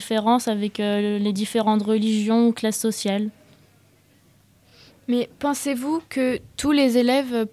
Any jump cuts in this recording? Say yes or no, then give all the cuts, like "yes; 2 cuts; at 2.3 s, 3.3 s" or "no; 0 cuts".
no; 0 cuts